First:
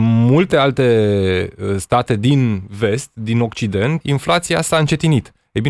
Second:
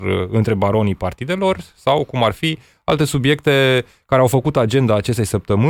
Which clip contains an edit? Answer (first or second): first